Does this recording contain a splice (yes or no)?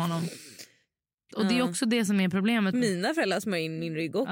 yes